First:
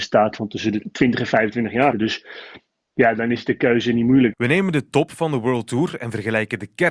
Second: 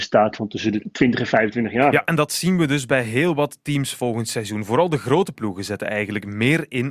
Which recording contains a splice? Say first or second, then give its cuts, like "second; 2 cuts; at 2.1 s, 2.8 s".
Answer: first; 2 cuts; at 1.9 s, 4.3 s